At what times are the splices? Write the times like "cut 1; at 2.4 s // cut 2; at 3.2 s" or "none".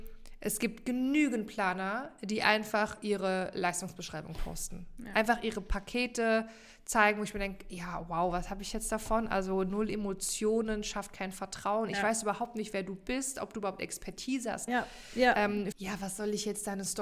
cut 1; at 14.7 s // cut 2; at 15.7 s